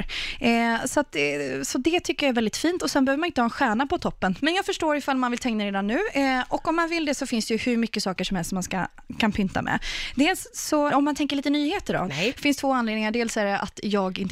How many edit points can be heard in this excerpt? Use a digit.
3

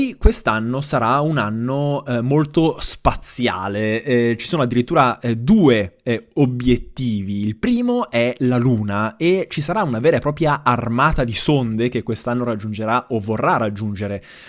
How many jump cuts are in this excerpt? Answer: 0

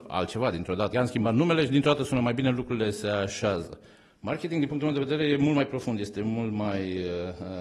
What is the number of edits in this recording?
1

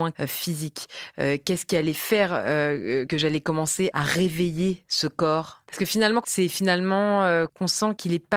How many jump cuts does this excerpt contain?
1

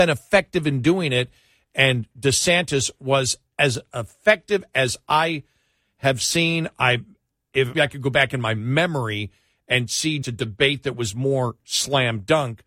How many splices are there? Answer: 2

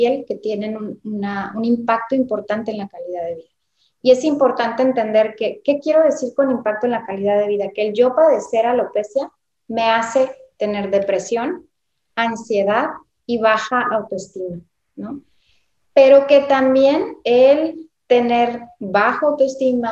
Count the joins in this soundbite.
0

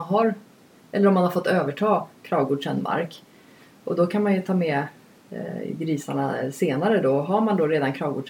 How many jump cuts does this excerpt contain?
0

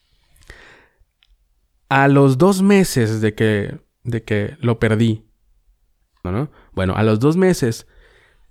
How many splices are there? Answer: 1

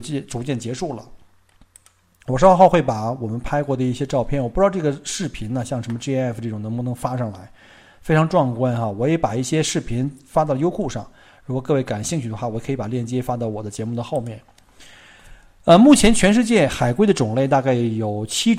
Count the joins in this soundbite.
0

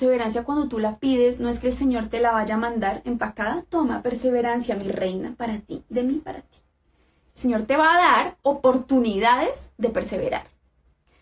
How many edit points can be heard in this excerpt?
0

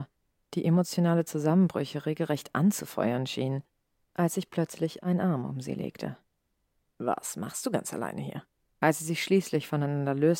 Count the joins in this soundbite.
2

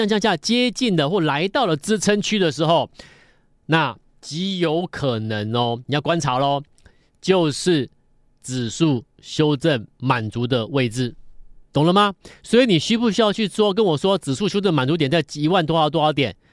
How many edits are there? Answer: 2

